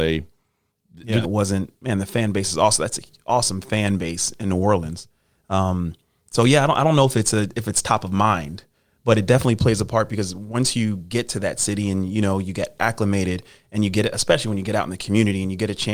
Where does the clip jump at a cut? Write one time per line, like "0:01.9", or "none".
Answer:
0:01.2